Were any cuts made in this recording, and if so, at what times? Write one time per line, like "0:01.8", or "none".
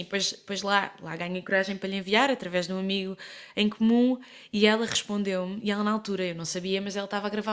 none